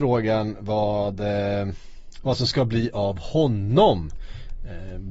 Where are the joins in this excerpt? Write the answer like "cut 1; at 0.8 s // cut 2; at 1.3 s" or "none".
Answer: none